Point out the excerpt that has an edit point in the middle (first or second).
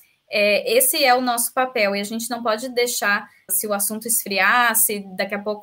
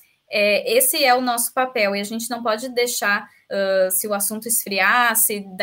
first